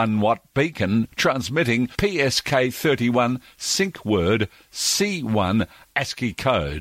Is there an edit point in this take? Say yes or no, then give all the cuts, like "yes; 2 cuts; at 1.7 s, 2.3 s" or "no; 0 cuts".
no; 0 cuts